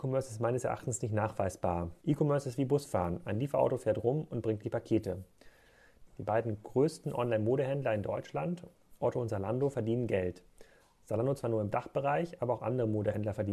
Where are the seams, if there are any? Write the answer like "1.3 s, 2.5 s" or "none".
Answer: 2.0 s, 6.1 s